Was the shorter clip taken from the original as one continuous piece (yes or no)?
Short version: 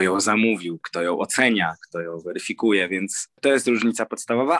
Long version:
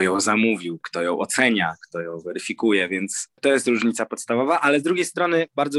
yes